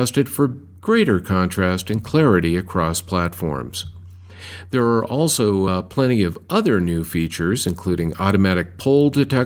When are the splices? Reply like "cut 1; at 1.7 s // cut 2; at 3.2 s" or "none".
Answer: none